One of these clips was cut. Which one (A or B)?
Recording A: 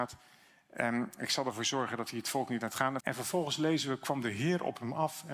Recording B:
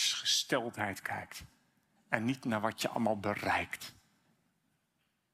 A